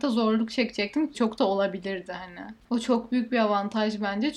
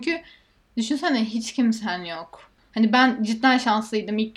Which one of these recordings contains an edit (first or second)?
first